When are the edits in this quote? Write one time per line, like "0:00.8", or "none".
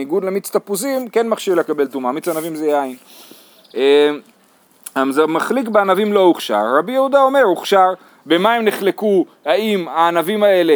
none